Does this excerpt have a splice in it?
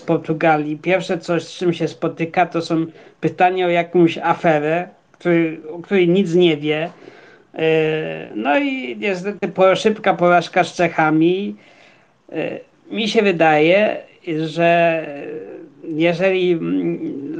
no; 0 cuts

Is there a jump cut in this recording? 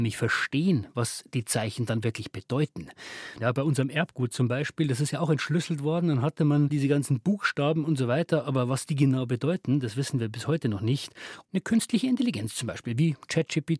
yes; 2 cuts; at 3.4 s, 11.4 s

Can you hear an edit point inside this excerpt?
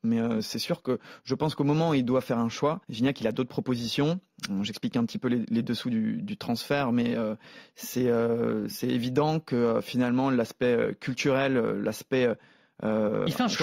yes; 1 cut; at 2.8 s

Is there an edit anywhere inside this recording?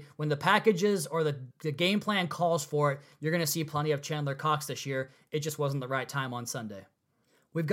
yes; 1 cut; at 1.5 s

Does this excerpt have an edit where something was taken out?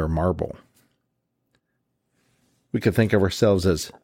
no; 0 cuts

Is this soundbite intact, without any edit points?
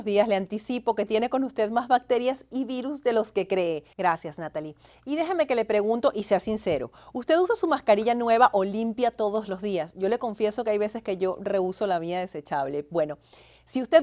no; 1 cut; at 3.9 s

